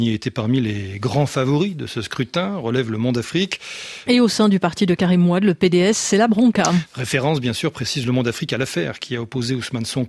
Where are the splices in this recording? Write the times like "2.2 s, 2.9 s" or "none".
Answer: 4.1 s, 6.9 s